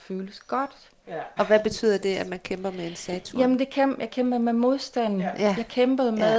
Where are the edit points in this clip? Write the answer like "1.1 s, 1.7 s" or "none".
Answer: 1.4 s